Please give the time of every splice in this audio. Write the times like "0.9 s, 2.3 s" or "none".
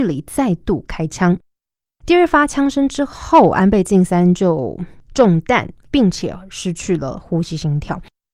5.9 s